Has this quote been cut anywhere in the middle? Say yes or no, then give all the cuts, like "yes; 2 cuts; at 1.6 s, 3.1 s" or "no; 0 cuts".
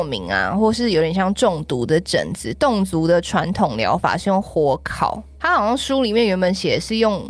no; 0 cuts